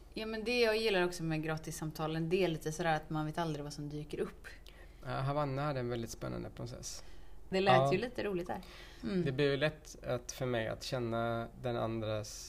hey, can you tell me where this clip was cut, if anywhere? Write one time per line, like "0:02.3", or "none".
0:05.0
0:07.5
0:09.0